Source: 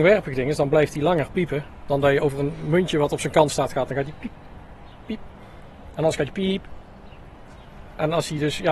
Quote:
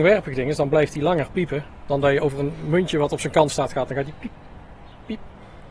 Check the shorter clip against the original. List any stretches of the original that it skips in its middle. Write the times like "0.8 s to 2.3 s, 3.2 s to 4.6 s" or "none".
none